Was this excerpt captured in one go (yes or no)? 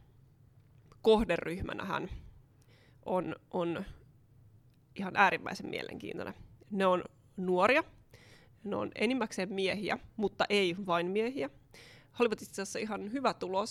no